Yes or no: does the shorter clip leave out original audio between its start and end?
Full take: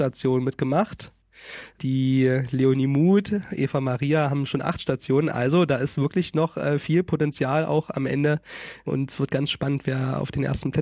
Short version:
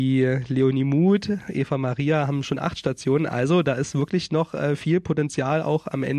no